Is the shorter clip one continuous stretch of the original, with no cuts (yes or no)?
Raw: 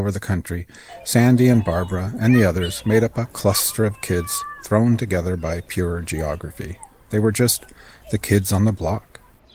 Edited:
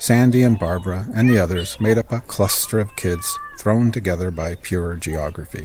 yes